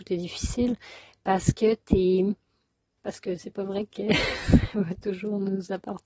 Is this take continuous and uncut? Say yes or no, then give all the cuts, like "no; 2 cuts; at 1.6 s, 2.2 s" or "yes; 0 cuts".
no; 1 cut; at 3.0 s